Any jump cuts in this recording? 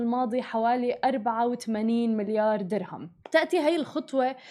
yes; 1 cut; at 3.2 s

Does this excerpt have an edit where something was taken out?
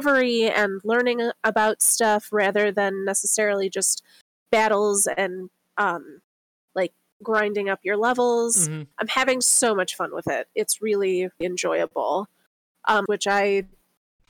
yes; 2 cuts; at 11.4 s, 13.1 s

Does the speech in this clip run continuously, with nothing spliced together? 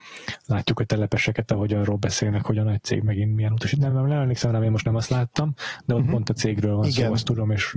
yes; 0 cuts

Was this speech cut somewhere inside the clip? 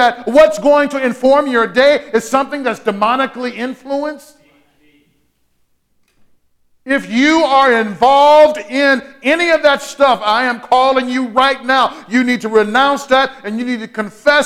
no; 0 cuts

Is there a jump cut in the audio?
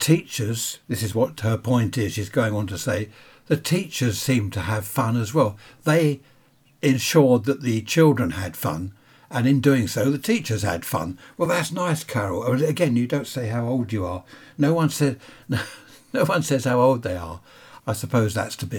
no; 0 cuts

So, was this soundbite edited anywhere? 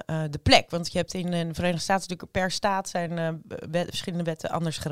no; 0 cuts

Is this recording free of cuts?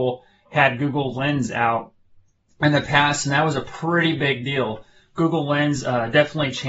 yes; 0 cuts

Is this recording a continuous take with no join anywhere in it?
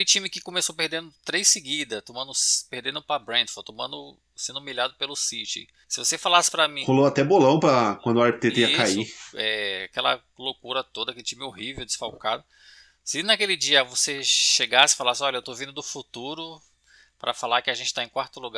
yes; 0 cuts

